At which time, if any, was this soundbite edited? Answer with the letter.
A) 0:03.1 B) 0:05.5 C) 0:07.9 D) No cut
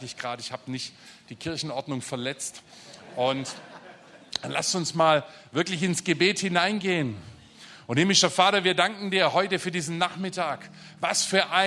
D